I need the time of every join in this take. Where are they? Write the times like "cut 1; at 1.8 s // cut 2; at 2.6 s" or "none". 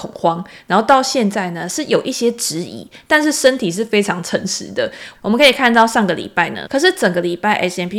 cut 1; at 5.2 s // cut 2; at 6.7 s